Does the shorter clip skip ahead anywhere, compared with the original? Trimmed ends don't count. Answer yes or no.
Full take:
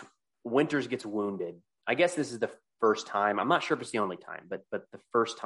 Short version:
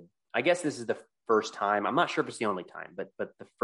no